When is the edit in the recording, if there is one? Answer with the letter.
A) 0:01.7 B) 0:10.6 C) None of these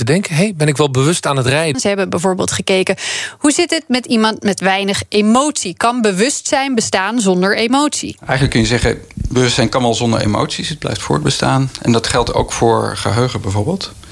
A